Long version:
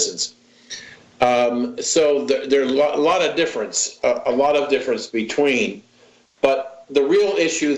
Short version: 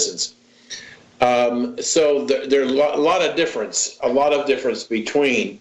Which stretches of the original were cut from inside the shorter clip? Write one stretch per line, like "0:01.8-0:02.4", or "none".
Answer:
0:04.0-0:04.2